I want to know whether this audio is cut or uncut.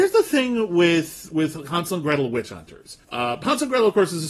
cut